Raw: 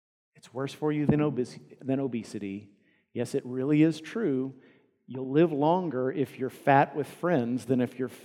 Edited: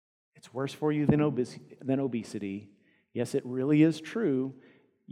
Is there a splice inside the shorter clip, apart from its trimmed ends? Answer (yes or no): no